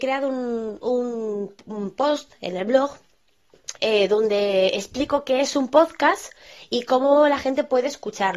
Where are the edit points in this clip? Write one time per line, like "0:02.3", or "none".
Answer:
0:03.8

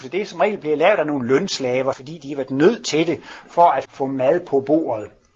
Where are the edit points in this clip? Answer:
0:01.9
0:03.8

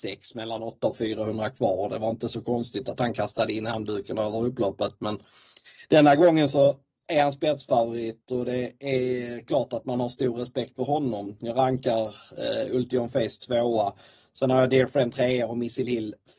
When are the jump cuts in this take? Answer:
none

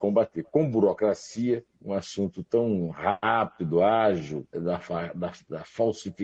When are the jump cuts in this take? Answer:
0:01.7
0:04.5

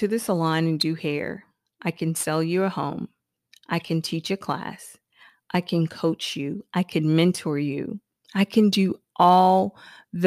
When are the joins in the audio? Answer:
none

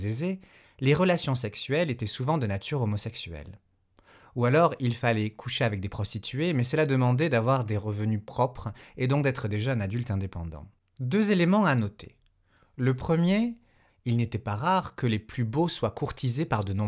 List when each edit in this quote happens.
0:10.8
0:13.9

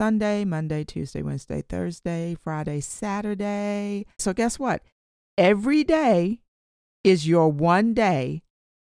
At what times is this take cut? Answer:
0:04.2

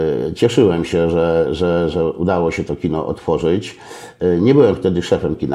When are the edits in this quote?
0:01.9

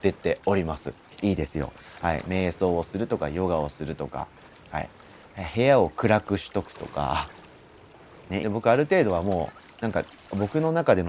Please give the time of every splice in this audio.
0:01.1
0:02.2
0:08.4

